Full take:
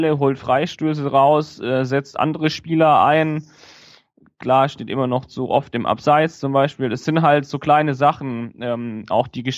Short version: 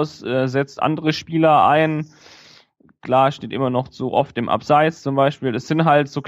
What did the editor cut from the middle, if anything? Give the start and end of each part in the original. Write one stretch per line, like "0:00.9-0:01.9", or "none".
none